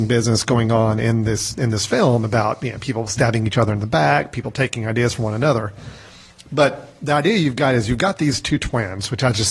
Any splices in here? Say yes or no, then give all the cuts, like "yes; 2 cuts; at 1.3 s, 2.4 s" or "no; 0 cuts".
no; 0 cuts